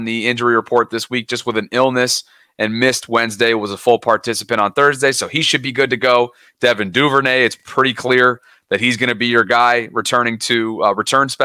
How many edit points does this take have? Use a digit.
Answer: 0